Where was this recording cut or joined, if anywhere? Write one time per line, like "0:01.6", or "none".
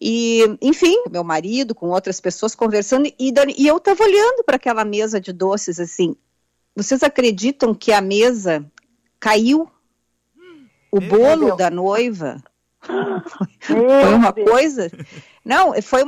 0:01.0